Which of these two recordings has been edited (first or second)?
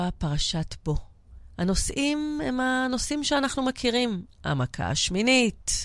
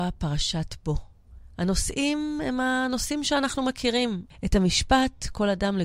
second